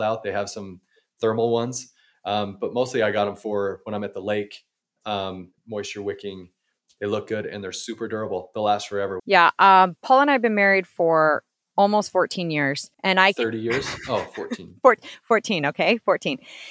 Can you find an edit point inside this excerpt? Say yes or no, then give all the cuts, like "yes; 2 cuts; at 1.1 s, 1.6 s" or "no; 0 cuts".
yes; 3 cuts; at 5.6 s, 9.2 s, 12.9 s